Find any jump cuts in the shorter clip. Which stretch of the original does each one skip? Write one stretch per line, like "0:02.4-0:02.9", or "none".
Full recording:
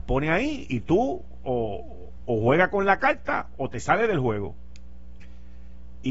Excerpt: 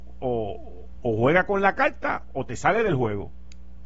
none